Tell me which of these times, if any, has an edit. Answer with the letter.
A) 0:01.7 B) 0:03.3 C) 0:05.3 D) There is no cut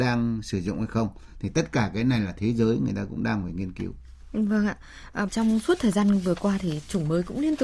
C